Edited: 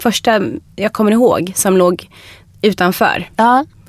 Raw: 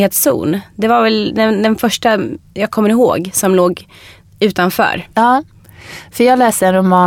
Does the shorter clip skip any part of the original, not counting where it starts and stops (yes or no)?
no